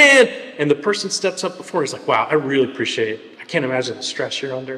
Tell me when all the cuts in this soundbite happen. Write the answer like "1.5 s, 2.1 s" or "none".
none